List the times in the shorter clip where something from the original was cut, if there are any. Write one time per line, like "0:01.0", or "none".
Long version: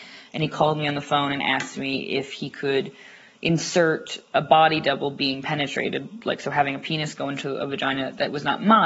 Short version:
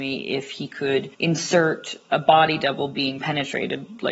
0:01.1